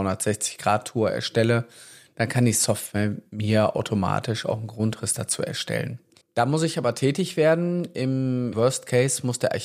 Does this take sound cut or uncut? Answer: cut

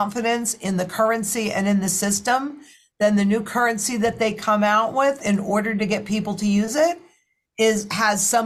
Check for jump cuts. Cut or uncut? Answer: uncut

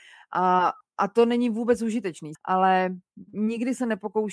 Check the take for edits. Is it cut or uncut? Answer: cut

